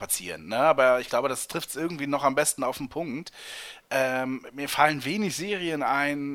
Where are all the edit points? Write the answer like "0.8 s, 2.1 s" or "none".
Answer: none

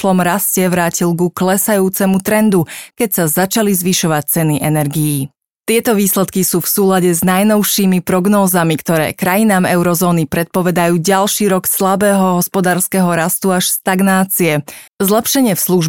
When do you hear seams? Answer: 2.9 s, 14.9 s

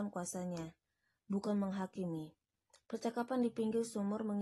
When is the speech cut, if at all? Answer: none

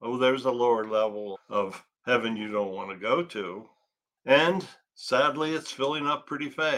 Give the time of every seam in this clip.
1.3 s, 4.2 s

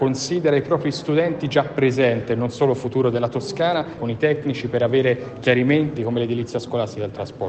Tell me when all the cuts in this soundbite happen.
4.0 s, 6.0 s

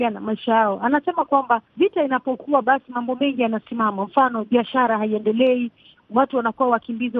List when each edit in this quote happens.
1.7 s

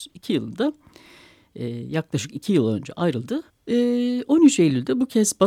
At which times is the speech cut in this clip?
3.5 s

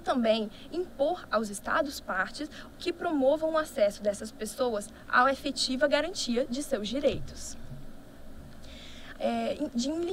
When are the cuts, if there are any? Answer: 9.2 s

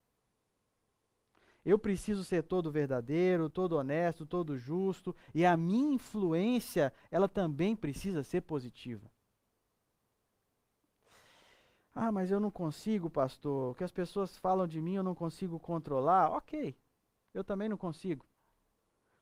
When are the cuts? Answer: none

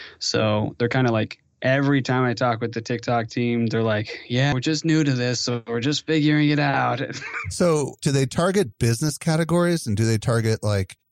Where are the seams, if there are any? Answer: 4.5 s

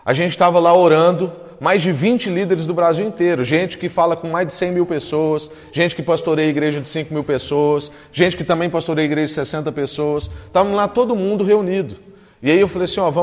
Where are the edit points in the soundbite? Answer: none

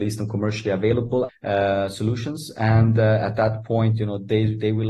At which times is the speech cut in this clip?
1.3 s

